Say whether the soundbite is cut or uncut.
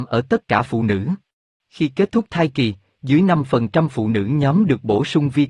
cut